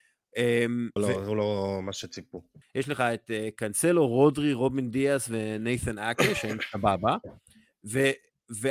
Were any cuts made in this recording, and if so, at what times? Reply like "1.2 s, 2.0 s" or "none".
1.0 s, 2.6 s